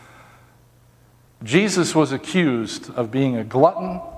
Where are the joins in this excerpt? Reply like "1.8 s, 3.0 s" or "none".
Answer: 1.3 s